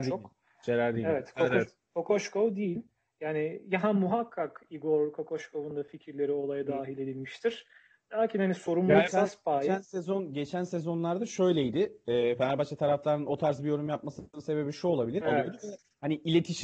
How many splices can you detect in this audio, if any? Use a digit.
2